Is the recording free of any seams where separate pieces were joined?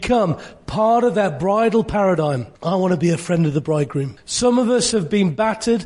no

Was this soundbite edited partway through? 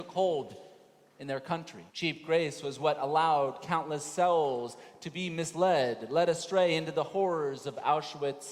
yes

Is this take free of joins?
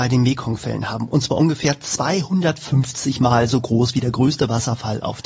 yes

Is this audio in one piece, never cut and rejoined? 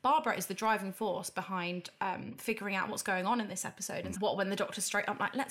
no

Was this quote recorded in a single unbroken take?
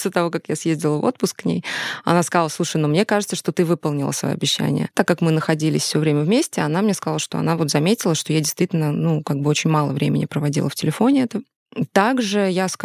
yes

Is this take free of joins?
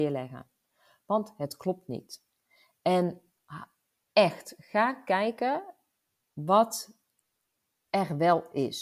yes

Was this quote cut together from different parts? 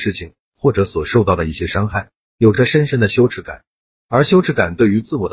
no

